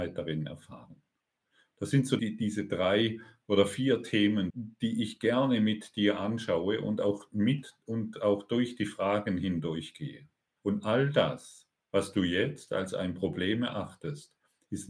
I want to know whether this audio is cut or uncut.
cut